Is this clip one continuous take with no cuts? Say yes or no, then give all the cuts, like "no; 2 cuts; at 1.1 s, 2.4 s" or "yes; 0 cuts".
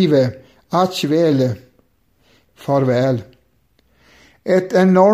no; 1 cut; at 2.5 s